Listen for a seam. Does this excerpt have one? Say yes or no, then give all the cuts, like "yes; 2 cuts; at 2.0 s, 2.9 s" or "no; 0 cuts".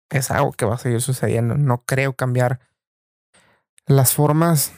no; 0 cuts